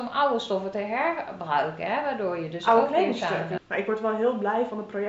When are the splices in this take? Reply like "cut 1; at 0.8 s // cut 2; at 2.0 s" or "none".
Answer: cut 1; at 3.6 s